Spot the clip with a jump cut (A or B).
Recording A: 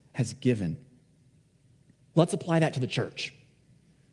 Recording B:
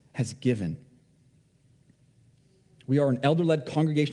A